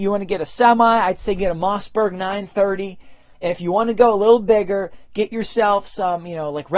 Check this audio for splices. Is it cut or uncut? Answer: cut